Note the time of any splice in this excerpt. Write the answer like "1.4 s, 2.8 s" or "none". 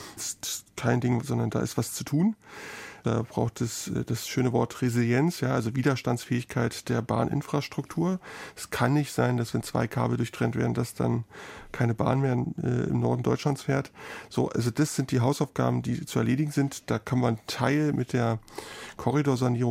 1.2 s